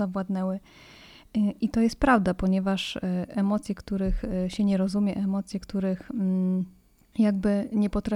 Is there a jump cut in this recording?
no; 0 cuts

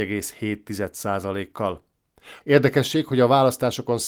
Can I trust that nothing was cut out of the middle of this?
no; 1 cut; at 2.4 s

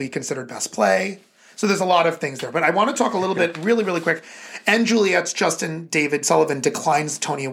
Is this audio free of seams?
yes; 0 cuts

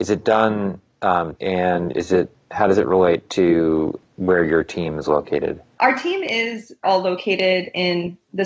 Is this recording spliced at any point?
yes; 2 cuts; at 1.3 s, 6.8 s

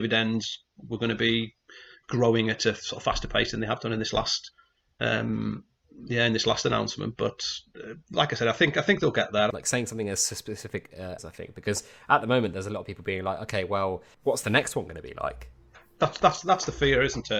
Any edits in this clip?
yes; 3 cuts; at 9.5 s, 11.2 s, 14.1 s

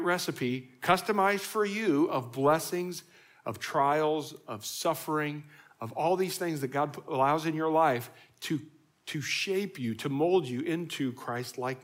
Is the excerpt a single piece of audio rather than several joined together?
yes; 0 cuts

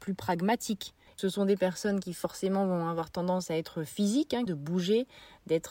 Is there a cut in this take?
yes; 2 cuts; at 1.2 s, 4.5 s

